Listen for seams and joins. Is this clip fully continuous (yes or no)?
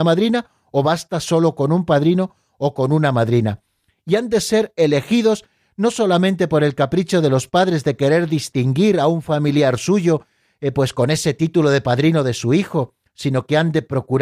yes